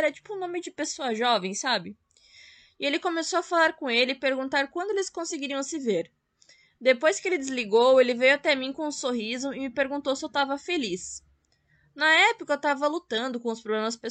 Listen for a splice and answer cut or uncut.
uncut